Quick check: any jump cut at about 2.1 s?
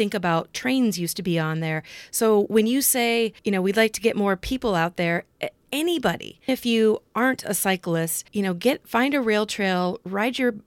no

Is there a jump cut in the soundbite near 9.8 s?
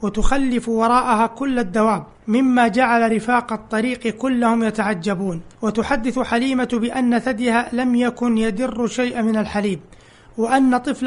no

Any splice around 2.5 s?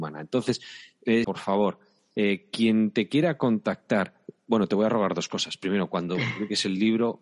no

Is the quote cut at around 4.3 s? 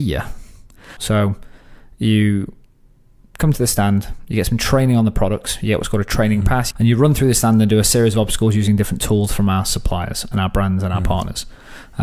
no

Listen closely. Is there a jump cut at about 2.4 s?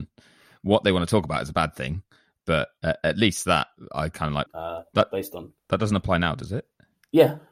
no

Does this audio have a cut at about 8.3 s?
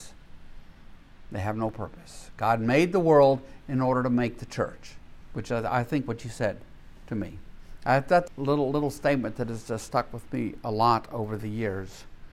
yes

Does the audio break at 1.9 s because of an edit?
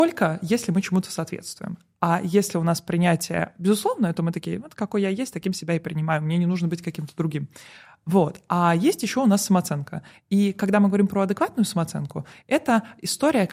no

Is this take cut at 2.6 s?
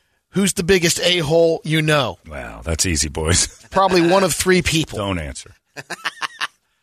no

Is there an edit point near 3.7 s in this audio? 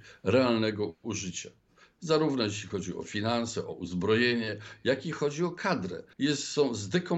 no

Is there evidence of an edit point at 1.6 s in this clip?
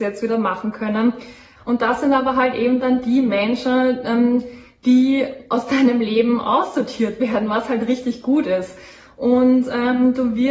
yes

